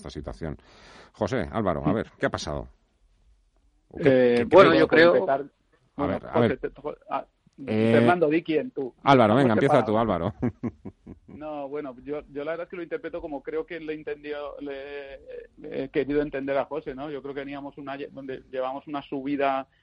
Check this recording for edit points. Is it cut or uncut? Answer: uncut